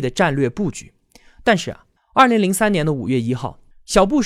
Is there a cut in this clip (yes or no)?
yes